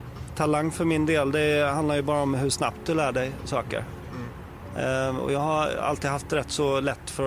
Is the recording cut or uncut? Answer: uncut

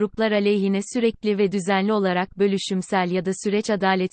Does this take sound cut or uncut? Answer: uncut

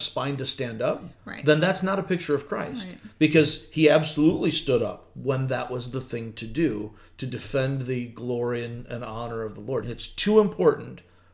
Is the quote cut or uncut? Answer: cut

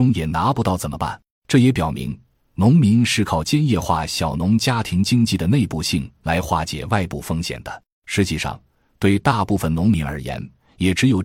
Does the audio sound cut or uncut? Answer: cut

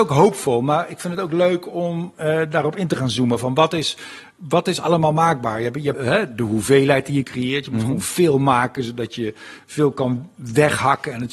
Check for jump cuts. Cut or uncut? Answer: cut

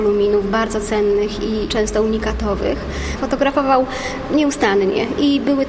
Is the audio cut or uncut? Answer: cut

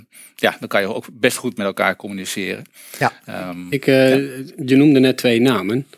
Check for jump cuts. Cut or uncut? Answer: uncut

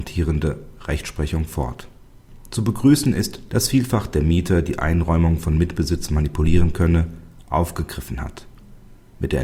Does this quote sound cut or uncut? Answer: cut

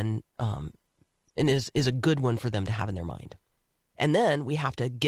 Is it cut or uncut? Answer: cut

